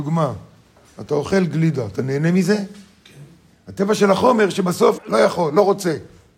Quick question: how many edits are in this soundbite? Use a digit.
2